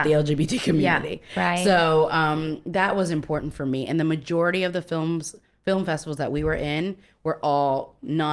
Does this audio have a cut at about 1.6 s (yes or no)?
no